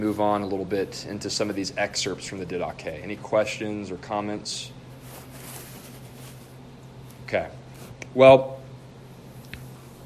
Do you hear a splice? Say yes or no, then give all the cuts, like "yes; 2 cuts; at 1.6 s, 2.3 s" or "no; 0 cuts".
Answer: no; 0 cuts